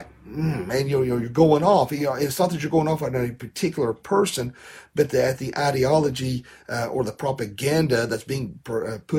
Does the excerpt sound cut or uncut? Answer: uncut